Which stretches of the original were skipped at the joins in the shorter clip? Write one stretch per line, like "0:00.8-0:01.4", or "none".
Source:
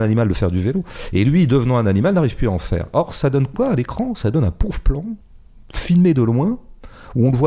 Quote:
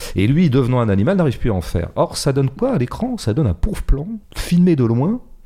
0:05.2-0:05.6